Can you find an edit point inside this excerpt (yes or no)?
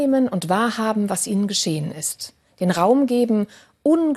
no